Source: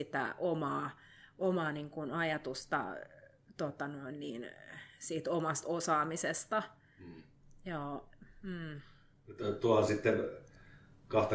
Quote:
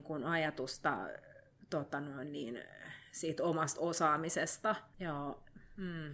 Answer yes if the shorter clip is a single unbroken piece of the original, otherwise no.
no